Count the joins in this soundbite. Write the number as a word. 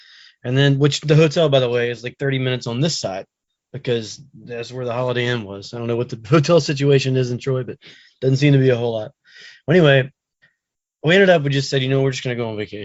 zero